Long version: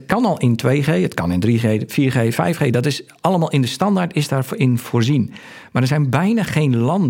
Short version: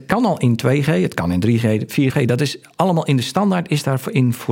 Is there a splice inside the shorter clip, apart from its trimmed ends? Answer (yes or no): yes